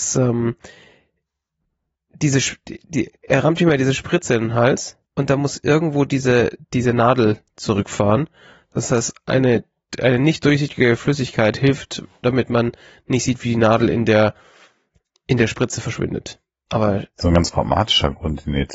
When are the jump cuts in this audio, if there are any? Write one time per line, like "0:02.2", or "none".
0:05.0
0:16.7